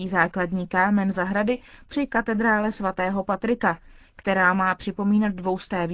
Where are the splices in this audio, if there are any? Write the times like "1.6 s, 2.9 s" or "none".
none